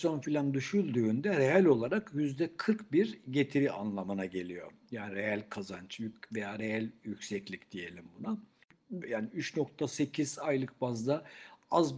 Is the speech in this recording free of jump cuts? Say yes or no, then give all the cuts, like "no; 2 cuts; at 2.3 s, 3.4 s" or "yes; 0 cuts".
no; 1 cut; at 9.0 s